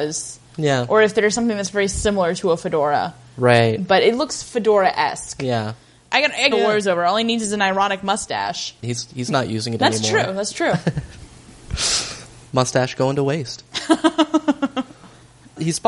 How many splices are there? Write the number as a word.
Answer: two